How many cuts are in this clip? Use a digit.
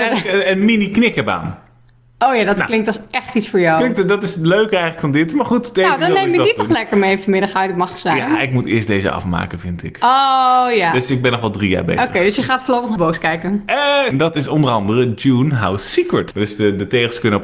3